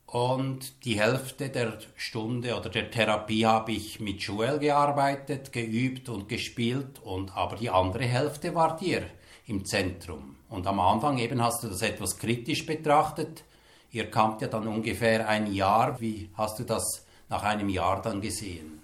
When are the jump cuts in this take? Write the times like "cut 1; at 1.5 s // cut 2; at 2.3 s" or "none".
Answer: cut 1; at 16.0 s